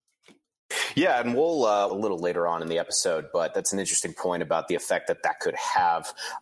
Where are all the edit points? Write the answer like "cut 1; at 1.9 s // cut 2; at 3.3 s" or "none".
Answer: cut 1; at 1.9 s